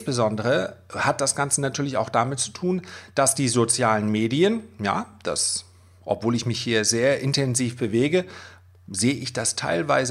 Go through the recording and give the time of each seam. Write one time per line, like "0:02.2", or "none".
none